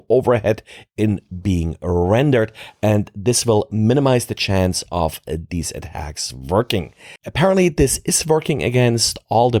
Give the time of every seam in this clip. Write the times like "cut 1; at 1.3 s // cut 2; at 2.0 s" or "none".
cut 1; at 7.2 s